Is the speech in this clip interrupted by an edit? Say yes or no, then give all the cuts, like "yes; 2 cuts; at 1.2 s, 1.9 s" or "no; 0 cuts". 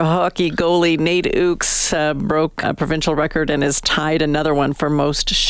yes; 1 cut; at 2.6 s